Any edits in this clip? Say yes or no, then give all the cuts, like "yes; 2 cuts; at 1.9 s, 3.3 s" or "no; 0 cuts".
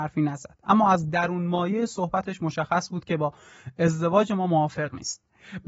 no; 0 cuts